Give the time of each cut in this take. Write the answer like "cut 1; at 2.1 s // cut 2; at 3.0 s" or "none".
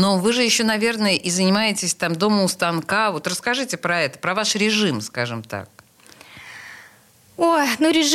none